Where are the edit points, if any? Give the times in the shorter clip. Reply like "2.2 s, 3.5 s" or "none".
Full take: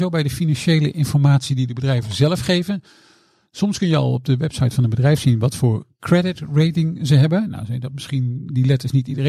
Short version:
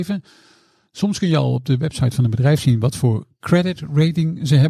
none